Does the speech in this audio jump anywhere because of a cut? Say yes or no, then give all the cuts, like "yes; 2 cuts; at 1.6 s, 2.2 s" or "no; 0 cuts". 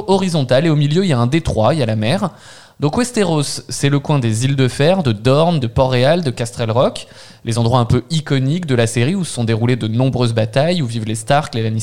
yes; 1 cut; at 5.6 s